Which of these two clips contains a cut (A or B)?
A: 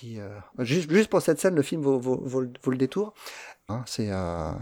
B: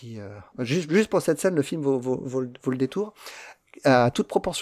A